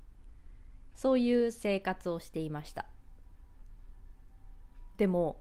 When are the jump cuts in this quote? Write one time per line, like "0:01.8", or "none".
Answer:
0:00.9